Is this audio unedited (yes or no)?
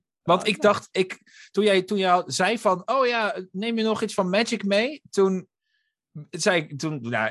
yes